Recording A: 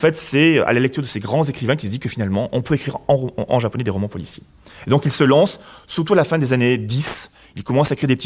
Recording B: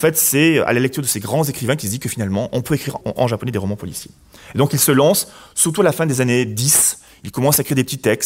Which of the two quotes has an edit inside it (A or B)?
B